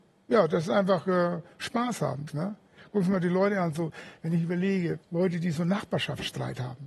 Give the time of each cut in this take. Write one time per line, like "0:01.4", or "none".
0:02.3
0:05.0